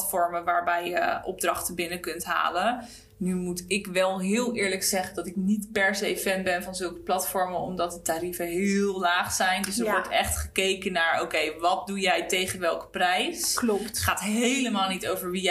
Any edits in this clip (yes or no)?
no